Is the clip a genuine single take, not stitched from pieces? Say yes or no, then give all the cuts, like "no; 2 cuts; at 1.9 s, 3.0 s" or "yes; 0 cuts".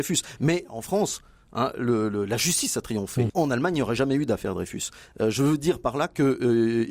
no; 1 cut; at 3.3 s